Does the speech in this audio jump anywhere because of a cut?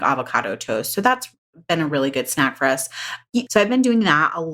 yes; 1 cut; at 3.5 s

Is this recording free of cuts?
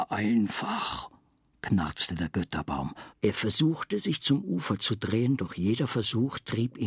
no; 1 cut; at 3.1 s

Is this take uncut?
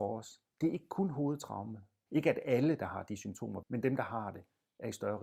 no; 2 cuts; at 2.1 s, 3.6 s

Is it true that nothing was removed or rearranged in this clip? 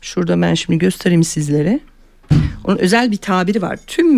yes; 0 cuts

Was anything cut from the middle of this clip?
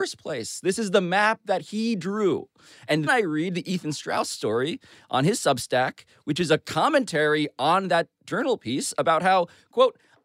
yes; 1 cut; at 3.1 s

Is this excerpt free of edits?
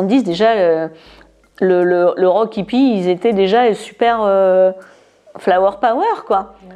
yes; 0 cuts

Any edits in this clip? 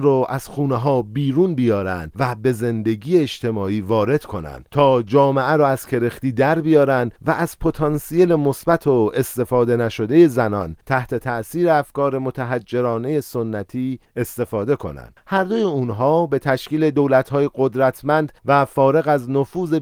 yes; 1 cut; at 15.2 s

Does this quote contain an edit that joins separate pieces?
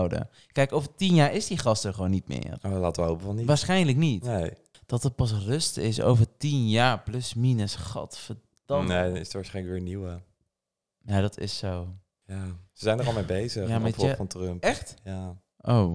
no; 0 cuts

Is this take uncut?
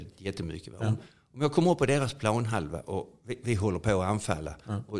yes; 0 cuts

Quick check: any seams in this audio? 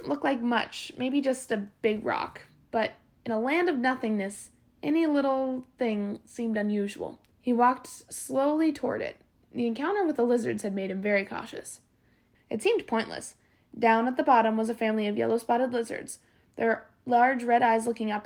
yes; 3 cuts; at 7.3 s, 12.3 s, 13.6 s

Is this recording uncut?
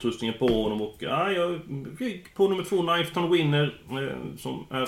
yes; 0 cuts

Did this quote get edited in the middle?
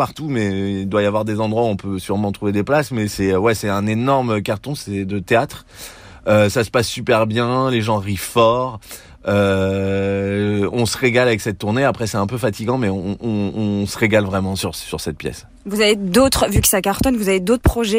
no; 0 cuts

